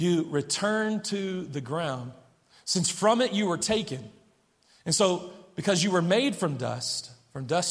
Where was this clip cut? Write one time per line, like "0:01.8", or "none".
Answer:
none